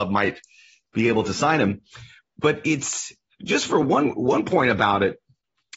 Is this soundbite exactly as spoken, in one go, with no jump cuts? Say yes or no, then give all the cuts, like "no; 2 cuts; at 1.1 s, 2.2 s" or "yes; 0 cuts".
yes; 0 cuts